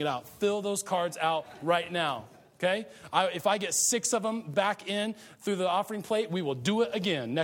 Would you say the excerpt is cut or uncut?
uncut